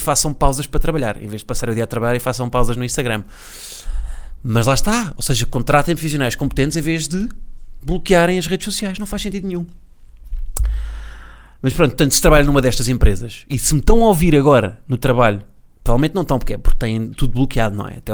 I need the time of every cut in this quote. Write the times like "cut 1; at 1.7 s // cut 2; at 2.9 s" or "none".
none